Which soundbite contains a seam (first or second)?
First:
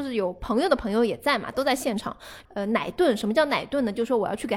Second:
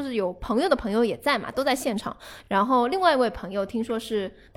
first